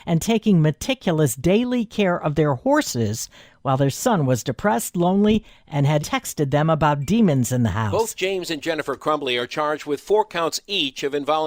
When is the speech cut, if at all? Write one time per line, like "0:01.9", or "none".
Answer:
0:06.0